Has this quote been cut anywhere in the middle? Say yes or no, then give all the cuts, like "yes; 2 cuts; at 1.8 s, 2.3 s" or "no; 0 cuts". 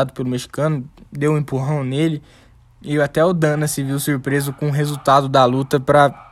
no; 0 cuts